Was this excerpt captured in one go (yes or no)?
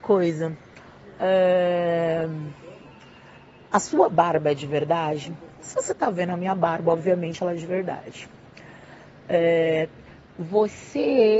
yes